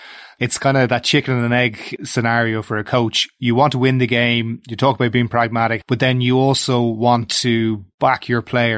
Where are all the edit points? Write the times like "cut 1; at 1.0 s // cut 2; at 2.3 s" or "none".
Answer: cut 1; at 5.8 s